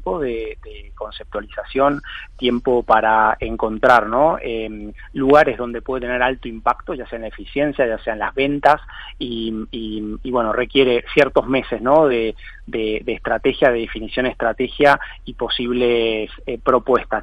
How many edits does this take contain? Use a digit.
0